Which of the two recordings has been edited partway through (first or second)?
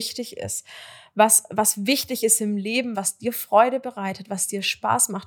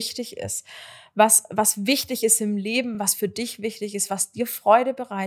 first